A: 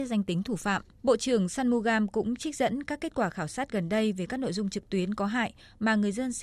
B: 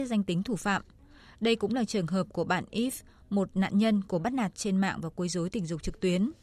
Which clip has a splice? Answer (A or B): A